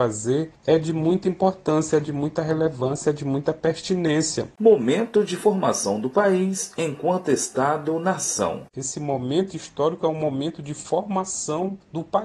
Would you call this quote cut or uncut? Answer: uncut